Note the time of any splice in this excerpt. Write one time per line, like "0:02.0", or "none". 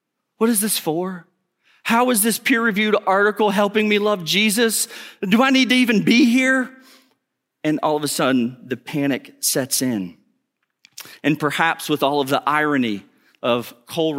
none